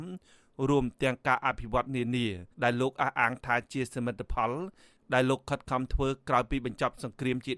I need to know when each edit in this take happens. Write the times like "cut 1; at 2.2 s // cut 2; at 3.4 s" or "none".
cut 1; at 2.5 s